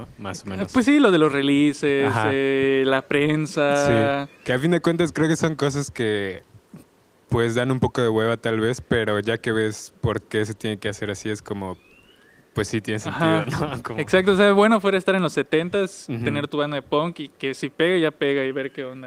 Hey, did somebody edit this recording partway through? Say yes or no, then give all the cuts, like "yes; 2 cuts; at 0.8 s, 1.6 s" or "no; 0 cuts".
no; 0 cuts